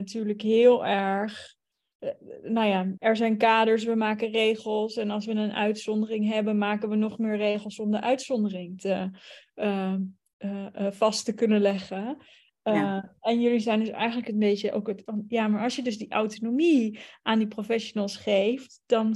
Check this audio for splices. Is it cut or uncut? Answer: cut